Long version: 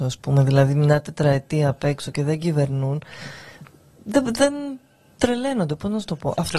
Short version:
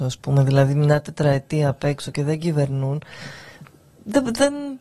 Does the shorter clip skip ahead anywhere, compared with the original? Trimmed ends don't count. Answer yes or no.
no